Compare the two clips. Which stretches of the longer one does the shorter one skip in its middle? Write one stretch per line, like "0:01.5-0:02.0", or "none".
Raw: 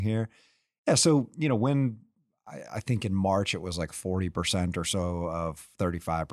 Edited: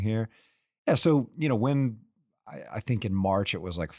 none